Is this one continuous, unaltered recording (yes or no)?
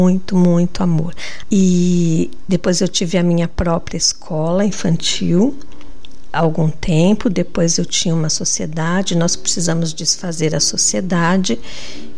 no